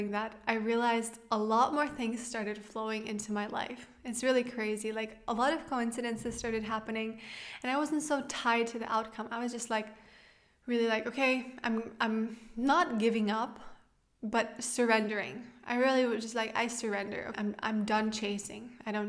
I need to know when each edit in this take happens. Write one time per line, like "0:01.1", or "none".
0:16.2
0:17.3